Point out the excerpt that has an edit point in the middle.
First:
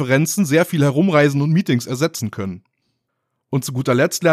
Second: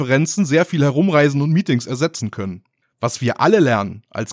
second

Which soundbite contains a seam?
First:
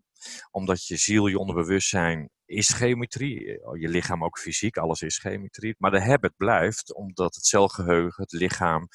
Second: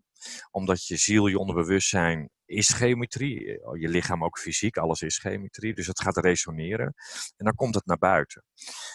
first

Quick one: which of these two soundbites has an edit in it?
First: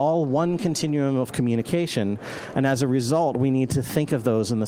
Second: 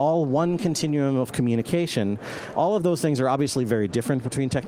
second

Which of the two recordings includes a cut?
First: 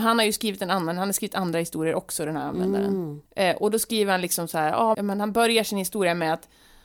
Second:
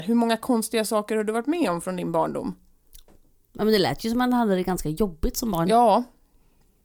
first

